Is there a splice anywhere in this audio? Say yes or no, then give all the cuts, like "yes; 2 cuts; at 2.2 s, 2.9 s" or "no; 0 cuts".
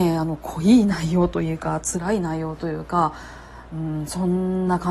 no; 0 cuts